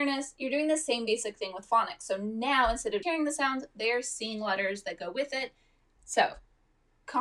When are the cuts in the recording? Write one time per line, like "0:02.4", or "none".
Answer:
0:03.0
0:06.0